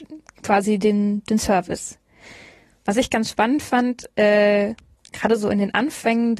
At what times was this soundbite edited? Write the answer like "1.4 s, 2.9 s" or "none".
none